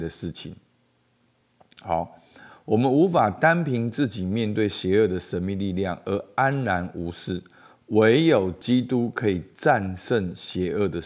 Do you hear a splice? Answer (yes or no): no